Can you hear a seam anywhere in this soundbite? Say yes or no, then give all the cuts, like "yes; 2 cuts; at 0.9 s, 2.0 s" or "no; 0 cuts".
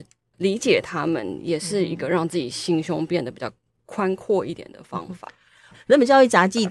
yes; 1 cut; at 5.7 s